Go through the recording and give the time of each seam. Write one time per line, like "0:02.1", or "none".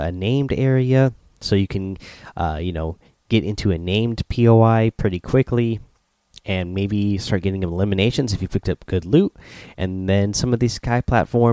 none